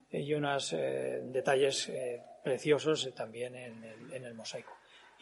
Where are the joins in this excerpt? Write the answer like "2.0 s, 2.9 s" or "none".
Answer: none

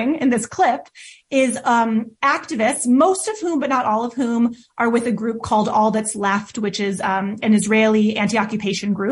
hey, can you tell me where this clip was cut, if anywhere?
none

